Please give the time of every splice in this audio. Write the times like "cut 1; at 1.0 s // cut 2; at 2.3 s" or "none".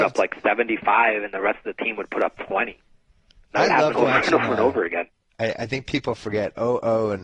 cut 1; at 5.2 s